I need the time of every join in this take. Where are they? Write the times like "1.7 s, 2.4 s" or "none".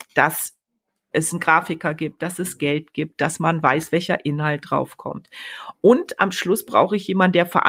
none